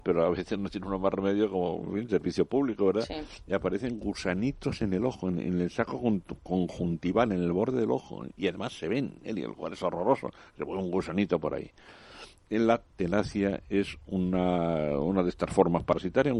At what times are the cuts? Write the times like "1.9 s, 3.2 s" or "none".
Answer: 12.9 s